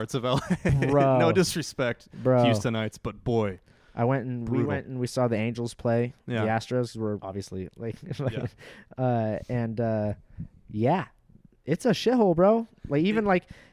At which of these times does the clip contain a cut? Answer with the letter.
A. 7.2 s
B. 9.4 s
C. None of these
A